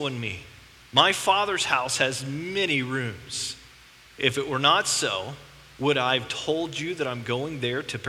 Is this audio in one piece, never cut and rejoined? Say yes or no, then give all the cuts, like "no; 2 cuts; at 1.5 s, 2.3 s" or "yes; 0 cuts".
yes; 0 cuts